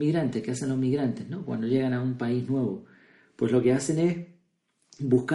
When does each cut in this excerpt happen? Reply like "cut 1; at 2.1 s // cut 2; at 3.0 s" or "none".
none